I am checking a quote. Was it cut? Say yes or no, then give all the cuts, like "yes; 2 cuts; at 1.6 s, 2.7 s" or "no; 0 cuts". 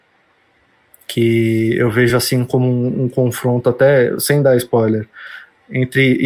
no; 0 cuts